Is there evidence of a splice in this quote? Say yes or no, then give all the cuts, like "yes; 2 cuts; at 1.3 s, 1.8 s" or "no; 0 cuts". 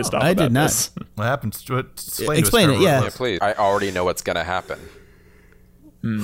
yes; 2 cuts; at 1.1 s, 3.4 s